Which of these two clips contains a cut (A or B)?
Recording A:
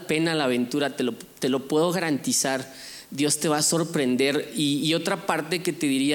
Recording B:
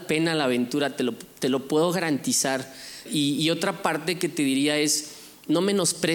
B